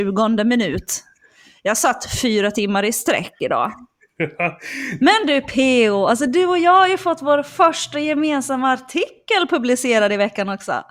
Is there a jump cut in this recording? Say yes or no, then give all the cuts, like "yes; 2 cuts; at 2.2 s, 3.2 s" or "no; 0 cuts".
yes; 1 cut; at 5.0 s